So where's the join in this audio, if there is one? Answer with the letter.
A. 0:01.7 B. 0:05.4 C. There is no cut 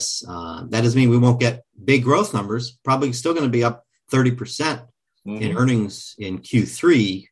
A